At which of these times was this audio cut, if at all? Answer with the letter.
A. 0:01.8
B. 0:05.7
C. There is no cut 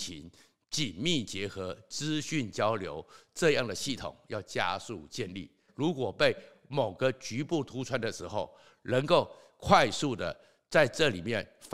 B